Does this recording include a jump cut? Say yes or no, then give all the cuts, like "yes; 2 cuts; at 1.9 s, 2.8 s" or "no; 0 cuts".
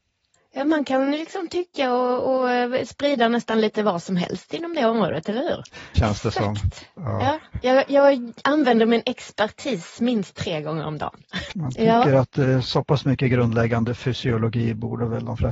yes; 2 cuts; at 6.0 s, 11.5 s